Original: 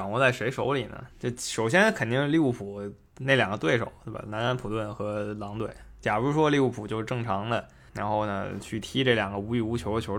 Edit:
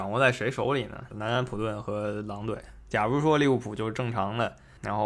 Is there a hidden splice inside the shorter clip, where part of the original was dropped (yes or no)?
yes